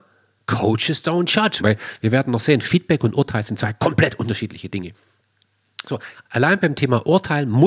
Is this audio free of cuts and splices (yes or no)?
no